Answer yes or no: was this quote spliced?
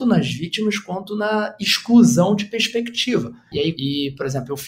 yes